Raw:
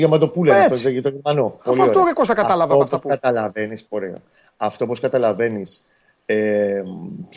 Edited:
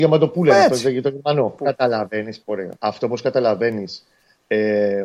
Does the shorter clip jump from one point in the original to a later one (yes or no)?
yes